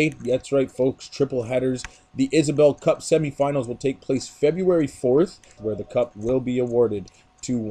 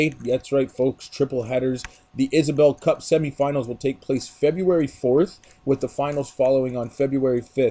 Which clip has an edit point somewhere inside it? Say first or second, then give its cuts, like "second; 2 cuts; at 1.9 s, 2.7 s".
first; 1 cut; at 5.6 s